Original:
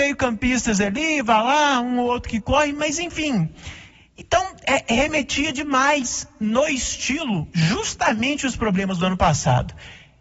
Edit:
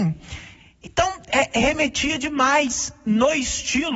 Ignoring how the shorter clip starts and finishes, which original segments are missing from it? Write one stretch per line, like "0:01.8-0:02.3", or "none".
none